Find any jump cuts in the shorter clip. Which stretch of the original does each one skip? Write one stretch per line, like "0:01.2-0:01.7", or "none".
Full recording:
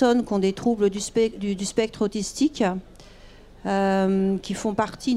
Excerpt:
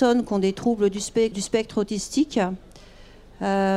0:01.3-0:01.6